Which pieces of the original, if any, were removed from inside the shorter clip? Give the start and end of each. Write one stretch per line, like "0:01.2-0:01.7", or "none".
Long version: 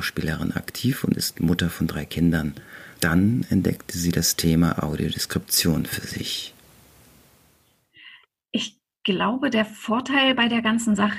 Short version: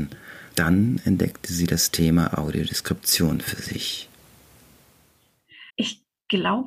0:08.1-0:08.4

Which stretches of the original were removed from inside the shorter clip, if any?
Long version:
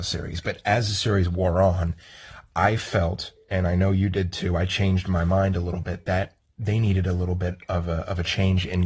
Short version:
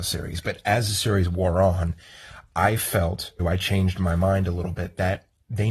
0:03.4-0:04.5

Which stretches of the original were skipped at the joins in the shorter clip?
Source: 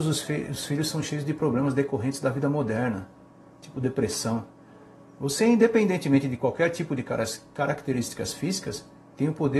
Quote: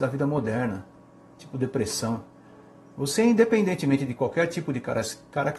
none

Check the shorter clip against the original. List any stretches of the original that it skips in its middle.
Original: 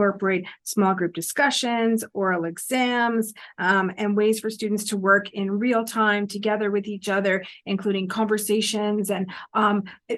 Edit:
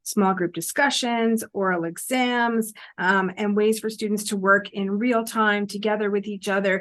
none

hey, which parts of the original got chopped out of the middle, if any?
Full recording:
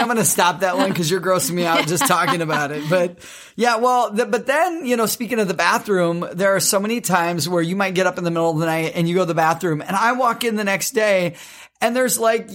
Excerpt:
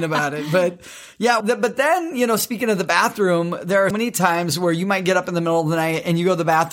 0:03.8-0:04.1
0:06.6-0:06.8

